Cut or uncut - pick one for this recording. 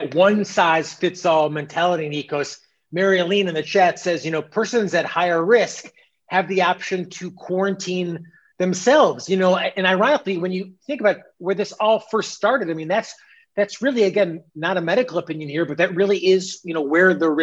uncut